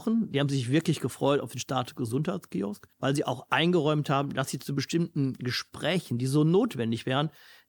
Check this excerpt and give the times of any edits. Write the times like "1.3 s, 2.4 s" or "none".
2.9 s